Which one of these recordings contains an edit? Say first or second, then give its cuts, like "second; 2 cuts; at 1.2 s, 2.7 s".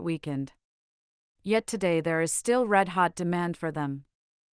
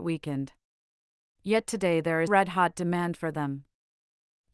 second; 1 cut; at 2.3 s